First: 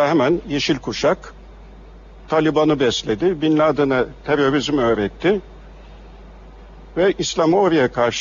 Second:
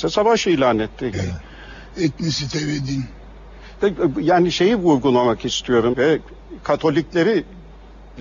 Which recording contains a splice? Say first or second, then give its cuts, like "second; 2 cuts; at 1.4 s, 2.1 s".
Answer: second; 2 cuts; at 1.1 s, 5.9 s